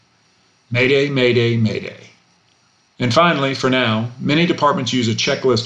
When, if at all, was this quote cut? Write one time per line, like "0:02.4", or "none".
0:02.9